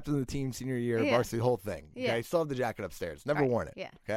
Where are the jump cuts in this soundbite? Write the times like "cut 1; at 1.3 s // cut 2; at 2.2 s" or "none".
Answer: none